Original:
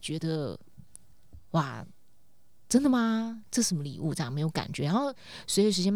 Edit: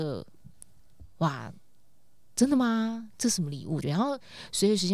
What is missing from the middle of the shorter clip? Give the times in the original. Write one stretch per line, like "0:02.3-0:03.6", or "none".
0:04.1-0:04.8